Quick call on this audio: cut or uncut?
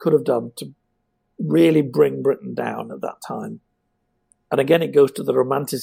uncut